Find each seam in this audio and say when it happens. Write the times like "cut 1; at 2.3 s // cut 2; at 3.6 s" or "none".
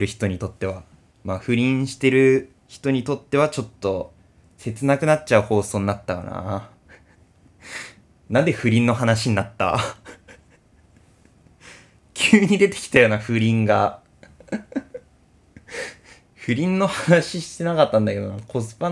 none